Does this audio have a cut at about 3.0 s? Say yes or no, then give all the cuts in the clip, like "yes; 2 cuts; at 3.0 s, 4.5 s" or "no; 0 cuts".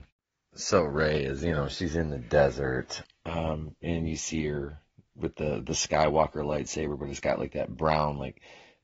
yes; 1 cut; at 3.0 s